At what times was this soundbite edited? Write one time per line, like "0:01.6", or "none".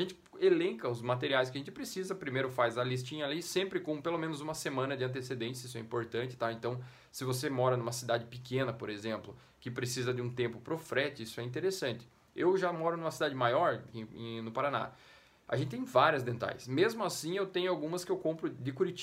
0:13.9